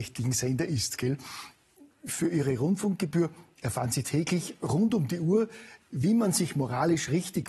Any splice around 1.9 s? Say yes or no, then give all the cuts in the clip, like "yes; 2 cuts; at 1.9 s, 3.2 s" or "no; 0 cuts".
no; 1 cut; at 5.8 s